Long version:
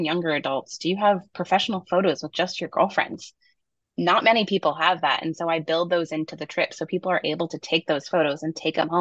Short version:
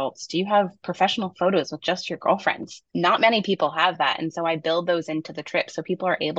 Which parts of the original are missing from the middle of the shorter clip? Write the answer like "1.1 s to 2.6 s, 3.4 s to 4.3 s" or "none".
3.4 s to 3.9 s